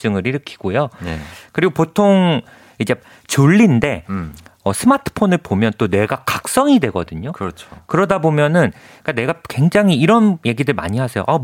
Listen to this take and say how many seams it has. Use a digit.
0